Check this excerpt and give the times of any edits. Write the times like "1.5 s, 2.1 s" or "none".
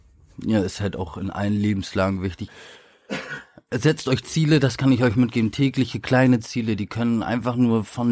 2.5 s